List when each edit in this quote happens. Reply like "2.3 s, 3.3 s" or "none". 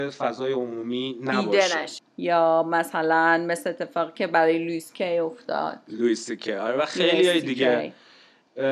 2.0 s